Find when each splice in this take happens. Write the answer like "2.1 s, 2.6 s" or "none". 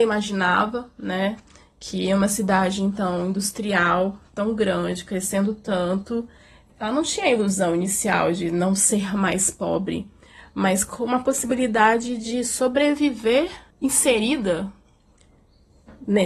none